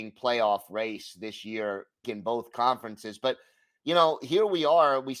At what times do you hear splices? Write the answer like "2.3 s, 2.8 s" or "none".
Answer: 2.0 s